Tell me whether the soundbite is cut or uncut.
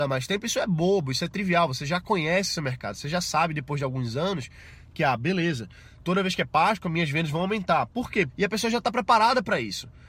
cut